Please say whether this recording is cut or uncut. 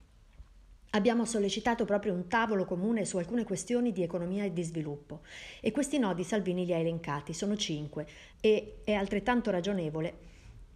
cut